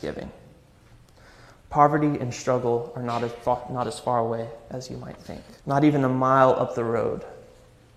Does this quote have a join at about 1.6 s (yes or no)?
no